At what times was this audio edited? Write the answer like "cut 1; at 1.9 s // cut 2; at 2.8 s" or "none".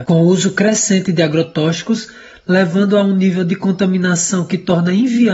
none